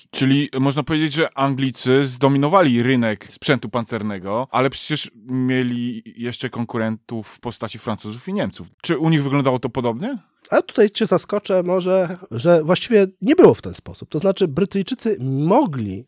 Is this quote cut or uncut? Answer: uncut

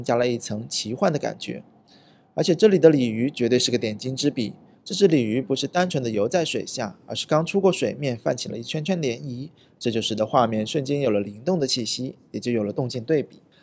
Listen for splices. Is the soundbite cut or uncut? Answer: uncut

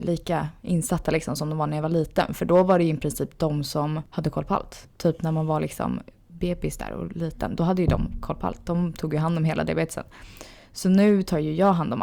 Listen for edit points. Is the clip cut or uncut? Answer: uncut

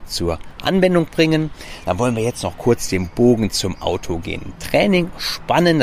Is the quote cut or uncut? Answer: uncut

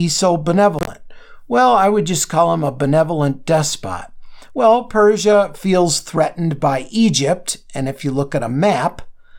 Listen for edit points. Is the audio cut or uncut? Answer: cut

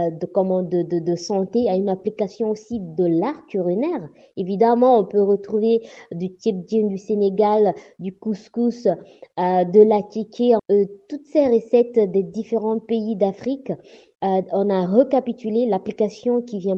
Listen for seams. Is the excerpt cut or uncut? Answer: cut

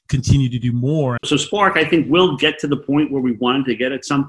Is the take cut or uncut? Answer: cut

